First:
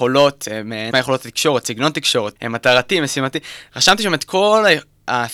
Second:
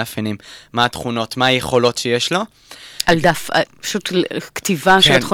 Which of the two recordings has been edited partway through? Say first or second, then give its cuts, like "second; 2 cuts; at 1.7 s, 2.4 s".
first; 2 cuts; at 0.9 s, 2.4 s